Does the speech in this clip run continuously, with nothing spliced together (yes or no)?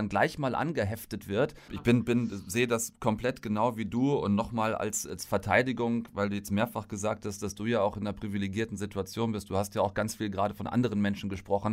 no